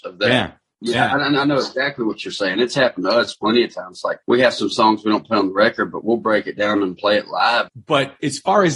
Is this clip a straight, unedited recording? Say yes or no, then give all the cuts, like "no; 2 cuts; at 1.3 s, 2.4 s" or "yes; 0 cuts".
no; 2 cuts; at 4.2 s, 7.7 s